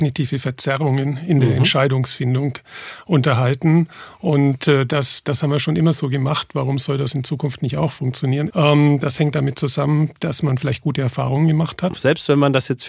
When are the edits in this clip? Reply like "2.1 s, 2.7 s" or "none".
8.5 s, 11.9 s